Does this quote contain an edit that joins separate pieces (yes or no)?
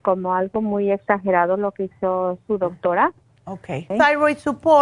yes